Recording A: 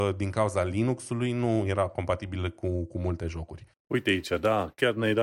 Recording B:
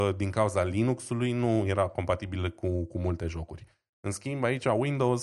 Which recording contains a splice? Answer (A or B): A